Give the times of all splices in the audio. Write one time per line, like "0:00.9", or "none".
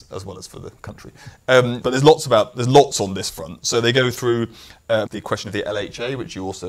0:01.8
0:05.1

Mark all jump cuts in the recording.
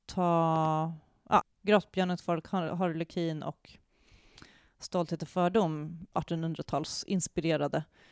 0:01.4
0:06.1

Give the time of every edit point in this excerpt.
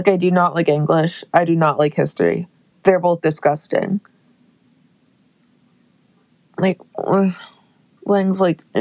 none

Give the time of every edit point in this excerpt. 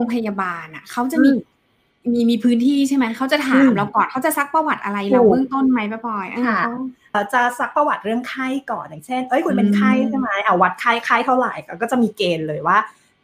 0:07.1

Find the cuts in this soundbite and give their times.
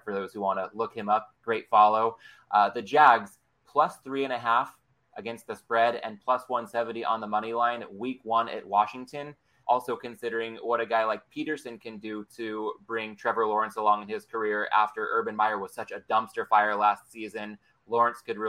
0:09.6

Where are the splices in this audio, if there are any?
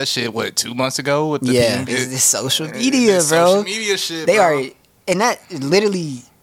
0:01.9

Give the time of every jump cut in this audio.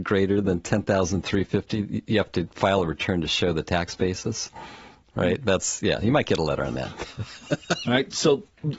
0:07.8

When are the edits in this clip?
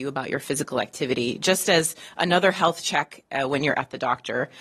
none

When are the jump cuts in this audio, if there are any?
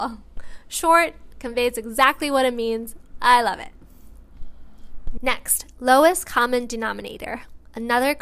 0:01.3
0:05.2

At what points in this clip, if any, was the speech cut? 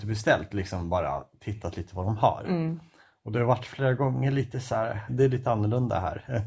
0:05.1

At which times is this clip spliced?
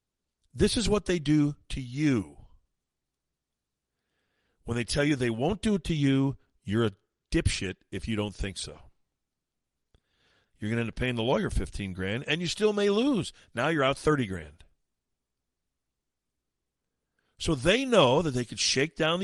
0:10.4

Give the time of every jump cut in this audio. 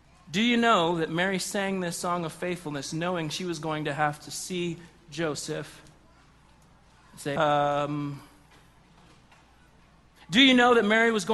0:07.4

